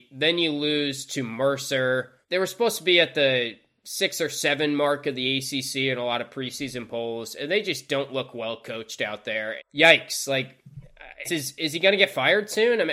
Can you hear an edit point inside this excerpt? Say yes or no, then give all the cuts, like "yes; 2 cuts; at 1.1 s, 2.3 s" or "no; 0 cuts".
yes; 3 cuts; at 2.2 s, 9.6 s, 11.2 s